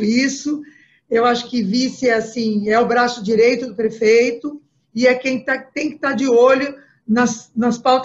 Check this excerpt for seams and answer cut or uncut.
uncut